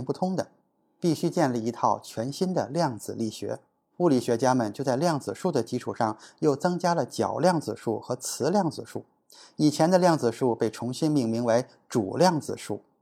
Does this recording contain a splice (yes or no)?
yes